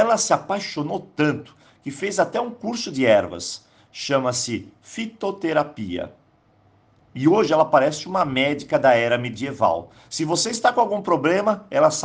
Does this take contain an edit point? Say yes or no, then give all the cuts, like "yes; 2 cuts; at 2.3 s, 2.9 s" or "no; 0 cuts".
no; 0 cuts